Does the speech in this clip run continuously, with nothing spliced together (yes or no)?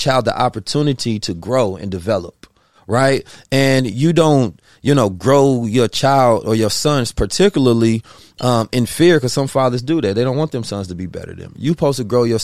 yes